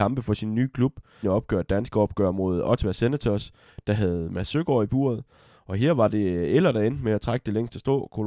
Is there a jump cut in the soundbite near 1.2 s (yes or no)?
yes